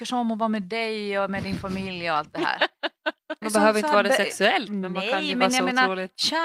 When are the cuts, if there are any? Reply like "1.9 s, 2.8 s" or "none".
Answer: 3.4 s